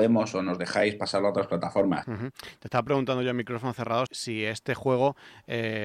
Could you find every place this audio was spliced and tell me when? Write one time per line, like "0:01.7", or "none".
0:02.0
0:04.1